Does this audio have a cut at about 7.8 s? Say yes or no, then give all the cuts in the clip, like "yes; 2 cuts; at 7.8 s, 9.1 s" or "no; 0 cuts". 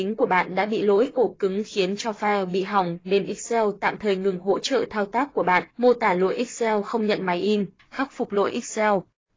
yes; 2 cuts; at 5.7 s, 7.8 s